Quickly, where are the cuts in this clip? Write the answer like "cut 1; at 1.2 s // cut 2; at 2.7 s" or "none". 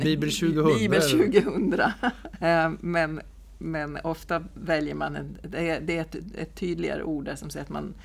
cut 1; at 2.4 s